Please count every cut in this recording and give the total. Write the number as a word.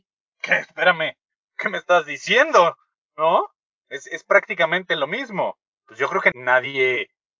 one